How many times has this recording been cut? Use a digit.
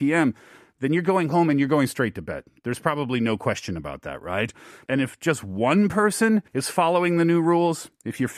2